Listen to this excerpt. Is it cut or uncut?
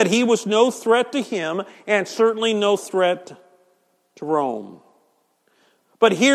uncut